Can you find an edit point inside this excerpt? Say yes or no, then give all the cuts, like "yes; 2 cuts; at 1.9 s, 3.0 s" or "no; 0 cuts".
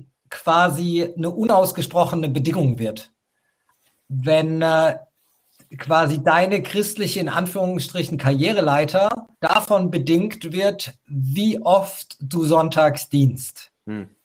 yes; 1 cut; at 9.3 s